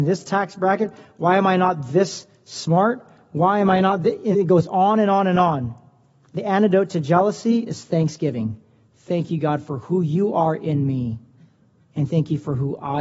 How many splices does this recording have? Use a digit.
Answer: 1